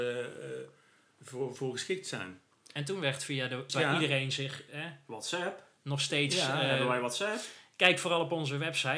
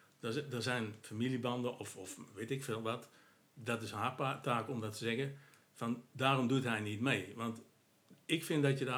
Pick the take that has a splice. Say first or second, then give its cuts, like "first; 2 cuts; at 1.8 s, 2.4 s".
first; 1 cut; at 3.7 s